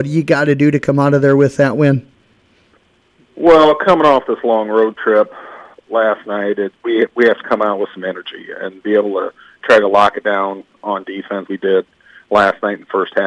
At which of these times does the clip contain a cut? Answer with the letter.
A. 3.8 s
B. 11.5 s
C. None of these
B